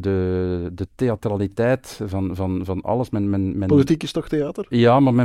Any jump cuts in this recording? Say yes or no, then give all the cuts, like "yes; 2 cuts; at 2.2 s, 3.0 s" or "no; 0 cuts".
no; 0 cuts